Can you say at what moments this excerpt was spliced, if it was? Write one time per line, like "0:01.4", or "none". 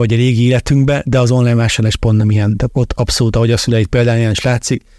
0:02.7